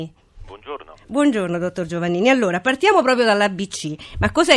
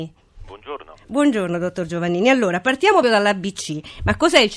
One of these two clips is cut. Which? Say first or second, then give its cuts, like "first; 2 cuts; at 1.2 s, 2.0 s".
second; 1 cut; at 3.0 s